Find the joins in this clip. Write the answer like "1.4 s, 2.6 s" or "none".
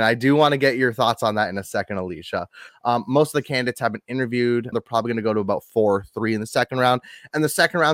2.7 s, 4.7 s